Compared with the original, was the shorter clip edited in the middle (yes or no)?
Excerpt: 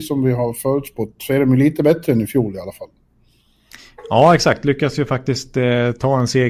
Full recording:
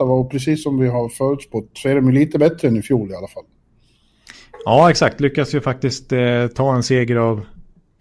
no